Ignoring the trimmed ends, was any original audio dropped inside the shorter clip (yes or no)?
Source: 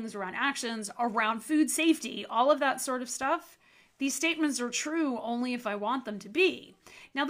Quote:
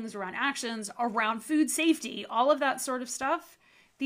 no